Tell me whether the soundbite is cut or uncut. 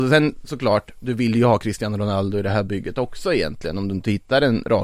uncut